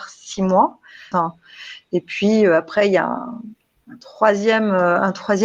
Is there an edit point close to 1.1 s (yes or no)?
yes